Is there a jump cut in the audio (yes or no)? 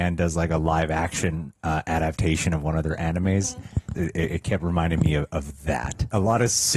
yes